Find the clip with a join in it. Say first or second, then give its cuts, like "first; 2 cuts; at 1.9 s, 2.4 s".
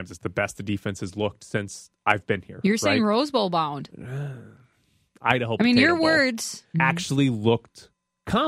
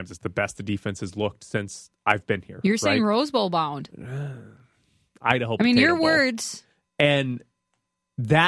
first; 1 cut; at 6.7 s